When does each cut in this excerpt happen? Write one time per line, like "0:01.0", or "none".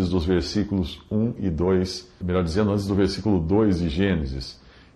0:02.2